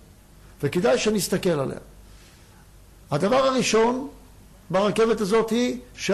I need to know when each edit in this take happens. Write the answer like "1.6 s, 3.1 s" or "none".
none